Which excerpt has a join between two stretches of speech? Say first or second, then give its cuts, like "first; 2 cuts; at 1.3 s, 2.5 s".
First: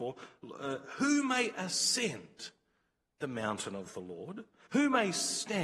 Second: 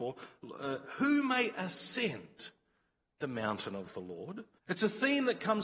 second; 1 cut; at 4.6 s